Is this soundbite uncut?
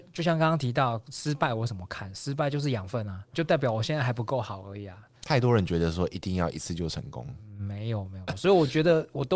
no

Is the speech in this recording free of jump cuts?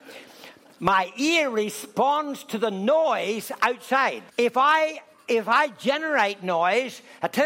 no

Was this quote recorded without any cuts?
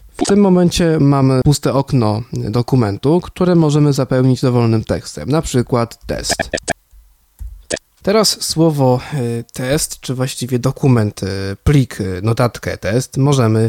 yes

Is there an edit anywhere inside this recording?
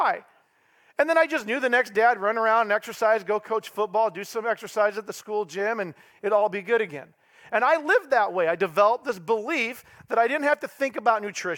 no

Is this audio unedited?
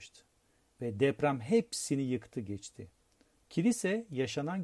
no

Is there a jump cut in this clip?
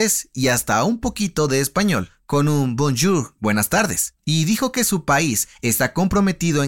yes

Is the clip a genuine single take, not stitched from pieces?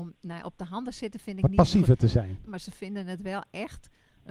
no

